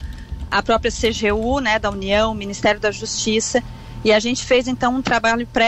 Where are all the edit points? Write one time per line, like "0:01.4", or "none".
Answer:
none